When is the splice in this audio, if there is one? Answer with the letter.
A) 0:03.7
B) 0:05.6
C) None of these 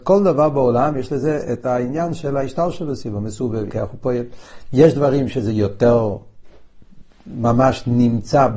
A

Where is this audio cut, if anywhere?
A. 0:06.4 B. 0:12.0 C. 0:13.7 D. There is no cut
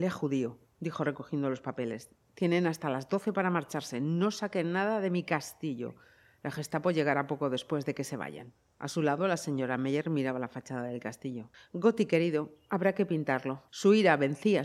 C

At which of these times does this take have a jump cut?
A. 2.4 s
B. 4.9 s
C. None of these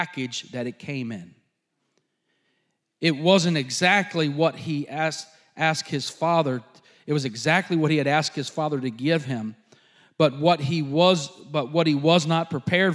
C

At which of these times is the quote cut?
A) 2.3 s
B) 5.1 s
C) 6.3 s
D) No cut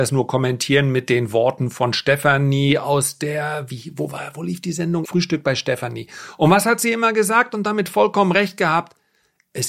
B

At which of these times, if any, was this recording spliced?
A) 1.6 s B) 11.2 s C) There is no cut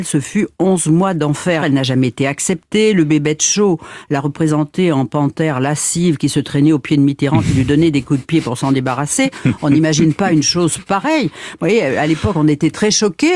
A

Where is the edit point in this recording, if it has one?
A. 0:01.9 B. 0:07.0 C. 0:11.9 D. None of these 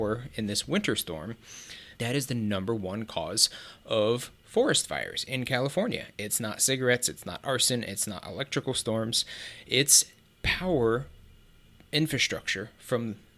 A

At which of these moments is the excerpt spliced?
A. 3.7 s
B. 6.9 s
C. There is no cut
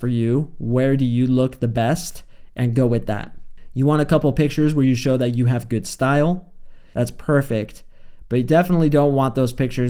B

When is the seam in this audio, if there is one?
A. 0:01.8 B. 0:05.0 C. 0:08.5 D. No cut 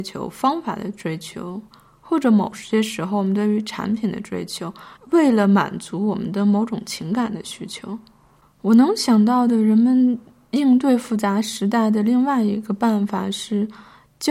B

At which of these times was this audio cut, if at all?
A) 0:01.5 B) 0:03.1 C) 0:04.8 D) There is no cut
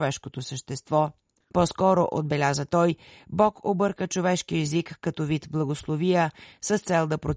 A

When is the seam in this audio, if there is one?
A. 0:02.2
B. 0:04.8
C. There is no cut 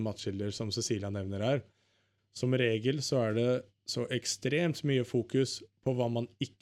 A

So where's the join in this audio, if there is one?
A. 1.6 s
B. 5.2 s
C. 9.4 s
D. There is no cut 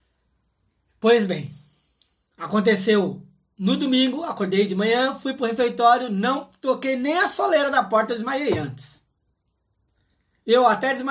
D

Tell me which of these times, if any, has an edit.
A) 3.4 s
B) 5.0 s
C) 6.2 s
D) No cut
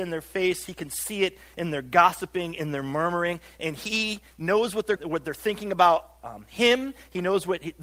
B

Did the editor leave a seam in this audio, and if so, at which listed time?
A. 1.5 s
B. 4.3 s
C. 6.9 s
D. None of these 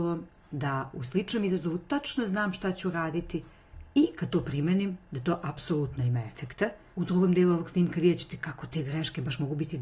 C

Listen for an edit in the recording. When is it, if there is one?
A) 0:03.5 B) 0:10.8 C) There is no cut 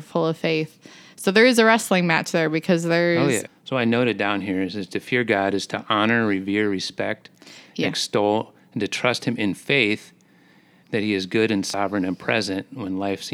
A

